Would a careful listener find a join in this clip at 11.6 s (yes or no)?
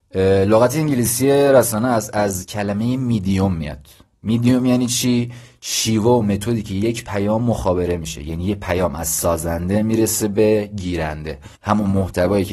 yes